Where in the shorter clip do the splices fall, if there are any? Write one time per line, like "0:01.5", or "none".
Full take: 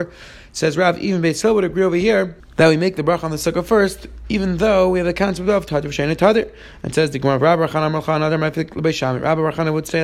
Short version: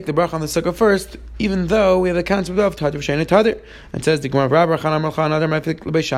none